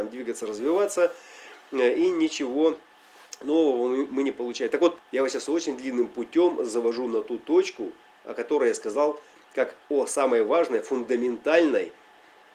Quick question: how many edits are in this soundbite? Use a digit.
1